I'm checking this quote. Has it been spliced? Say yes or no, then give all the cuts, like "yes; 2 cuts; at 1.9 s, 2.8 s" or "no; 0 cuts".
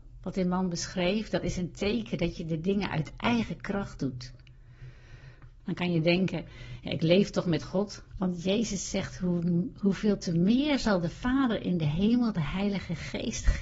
yes; 2 cuts; at 5.6 s, 8.1 s